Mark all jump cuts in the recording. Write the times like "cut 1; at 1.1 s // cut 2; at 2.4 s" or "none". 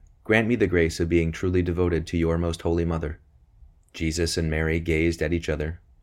cut 1; at 3.8 s